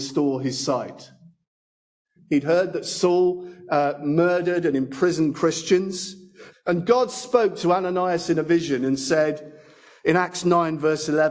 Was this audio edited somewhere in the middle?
yes; 2 cuts; at 2.2 s, 6.5 s

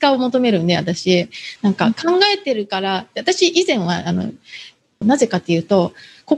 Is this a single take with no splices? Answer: no; 2 cuts; at 1.6 s, 5.0 s

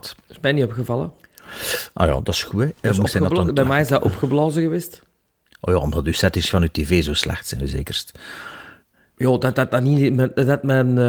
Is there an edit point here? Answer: no; 0 cuts

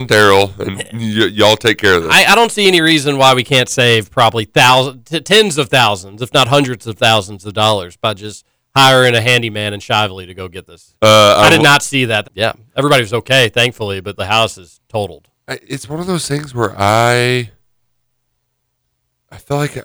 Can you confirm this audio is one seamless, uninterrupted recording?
no; 2 cuts; at 11.0 s, 12.2 s

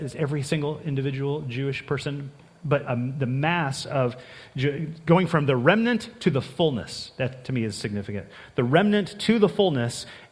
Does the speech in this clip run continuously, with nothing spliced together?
no; 1 cut; at 2.9 s

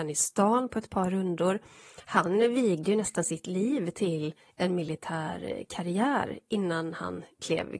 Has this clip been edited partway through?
no; 0 cuts

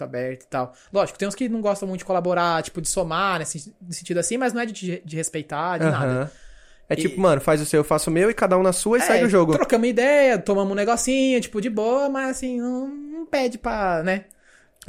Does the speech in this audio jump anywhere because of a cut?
no; 0 cuts

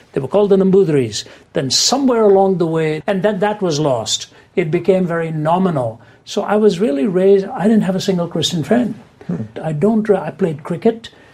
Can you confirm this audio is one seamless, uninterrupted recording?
no; 2 cuts; at 3.0 s, 9.5 s

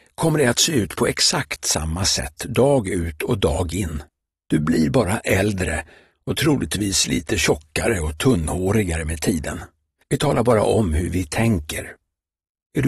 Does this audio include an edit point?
yes; 1 cut; at 10.0 s

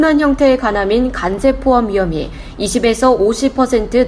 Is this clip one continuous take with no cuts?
yes; 0 cuts

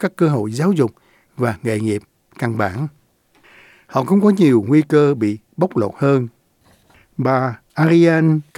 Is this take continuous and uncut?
yes; 0 cuts

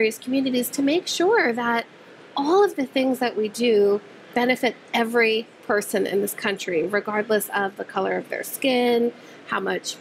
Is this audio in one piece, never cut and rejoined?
yes; 0 cuts

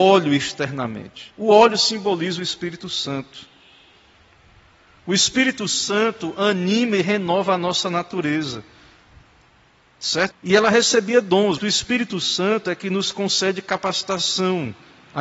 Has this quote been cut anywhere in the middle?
yes; 2 cuts; at 10.3 s, 11.6 s

